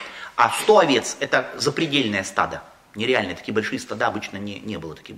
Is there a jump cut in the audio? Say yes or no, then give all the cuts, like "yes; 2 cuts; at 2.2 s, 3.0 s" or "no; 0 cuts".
no; 0 cuts